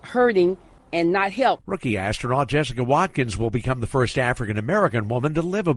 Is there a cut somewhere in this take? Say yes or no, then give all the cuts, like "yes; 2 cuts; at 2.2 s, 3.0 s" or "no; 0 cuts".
yes; 1 cut; at 1.6 s